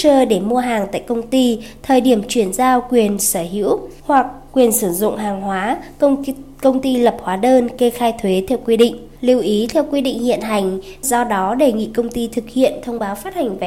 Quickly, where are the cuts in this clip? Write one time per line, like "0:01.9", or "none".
0:04.0
0:09.2
0:11.0